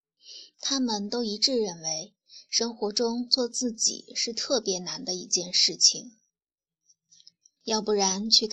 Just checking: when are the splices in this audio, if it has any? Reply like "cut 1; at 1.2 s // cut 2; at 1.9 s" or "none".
cut 1; at 7.6 s